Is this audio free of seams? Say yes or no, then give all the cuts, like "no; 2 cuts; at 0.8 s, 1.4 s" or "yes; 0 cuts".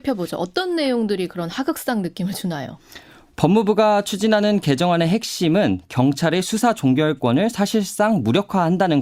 yes; 0 cuts